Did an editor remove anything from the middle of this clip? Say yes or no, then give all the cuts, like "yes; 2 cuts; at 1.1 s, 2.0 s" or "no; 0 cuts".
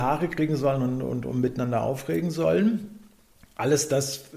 no; 0 cuts